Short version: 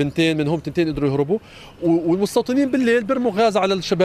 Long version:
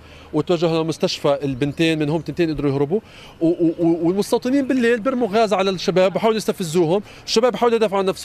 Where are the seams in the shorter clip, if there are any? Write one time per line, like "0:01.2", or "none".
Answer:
0:01.8

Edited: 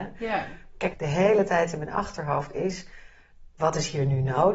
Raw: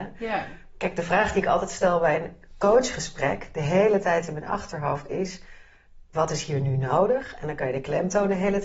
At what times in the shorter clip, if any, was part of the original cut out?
0:00.9

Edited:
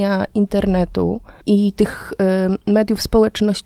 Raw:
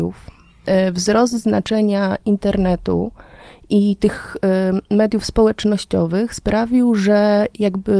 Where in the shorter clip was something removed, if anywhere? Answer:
0:01.4

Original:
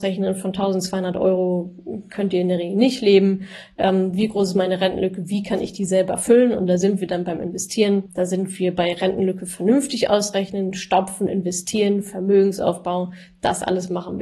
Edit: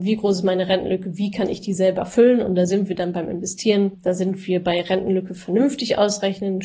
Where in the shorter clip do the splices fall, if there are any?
none

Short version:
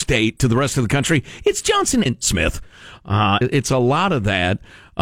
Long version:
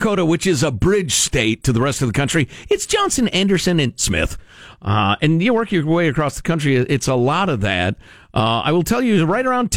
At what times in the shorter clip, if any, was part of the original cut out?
0:02.1
0:03.4

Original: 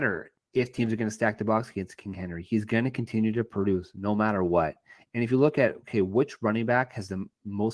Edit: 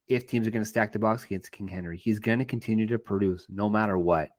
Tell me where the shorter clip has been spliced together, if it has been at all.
none

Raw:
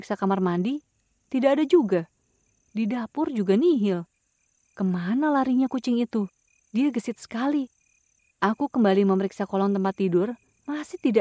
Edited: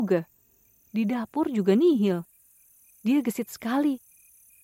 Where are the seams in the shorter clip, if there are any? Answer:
0:02.9

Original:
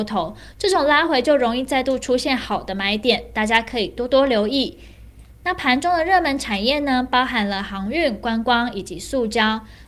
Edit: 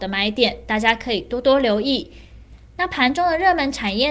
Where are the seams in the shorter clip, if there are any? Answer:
none

